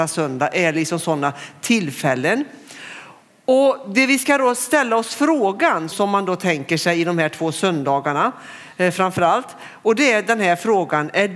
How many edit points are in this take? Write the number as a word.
one